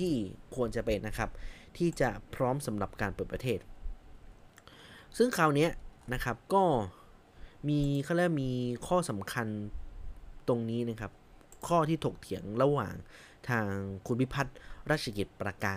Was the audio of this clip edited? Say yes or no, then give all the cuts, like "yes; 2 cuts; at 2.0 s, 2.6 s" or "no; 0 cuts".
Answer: yes; 2 cuts; at 1.0 s, 6.4 s